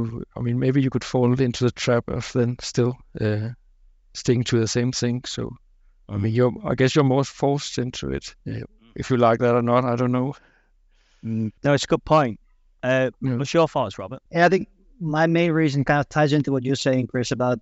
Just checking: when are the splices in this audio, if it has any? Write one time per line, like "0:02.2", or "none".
none